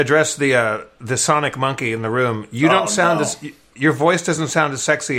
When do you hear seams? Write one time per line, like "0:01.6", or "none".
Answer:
none